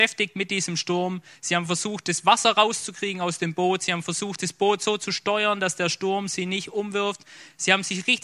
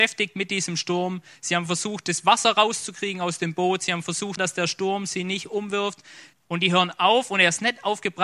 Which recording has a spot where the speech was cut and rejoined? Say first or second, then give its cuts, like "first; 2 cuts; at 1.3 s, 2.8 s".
second; 2 cuts; at 4.4 s, 6.3 s